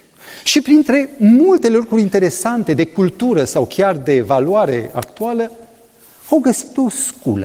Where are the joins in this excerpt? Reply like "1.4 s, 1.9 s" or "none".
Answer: none